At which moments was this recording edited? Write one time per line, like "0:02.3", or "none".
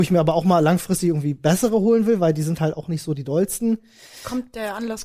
none